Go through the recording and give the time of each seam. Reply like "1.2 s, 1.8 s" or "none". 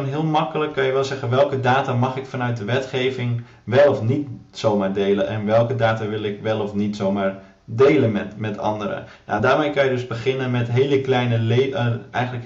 none